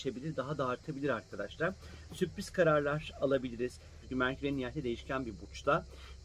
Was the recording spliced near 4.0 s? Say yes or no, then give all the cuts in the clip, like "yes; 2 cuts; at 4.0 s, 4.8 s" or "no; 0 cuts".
yes; 2 cuts; at 2.1 s, 4.0 s